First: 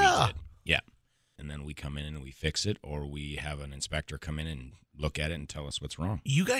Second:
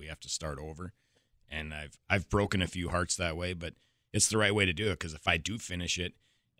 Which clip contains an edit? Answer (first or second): first